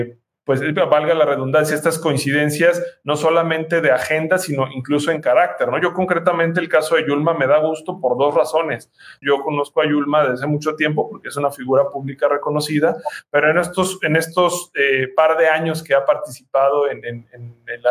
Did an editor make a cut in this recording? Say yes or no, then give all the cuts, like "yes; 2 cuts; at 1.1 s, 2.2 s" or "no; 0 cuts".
yes; 1 cut; at 9.2 s